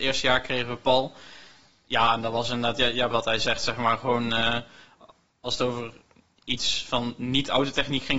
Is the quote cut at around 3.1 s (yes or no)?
yes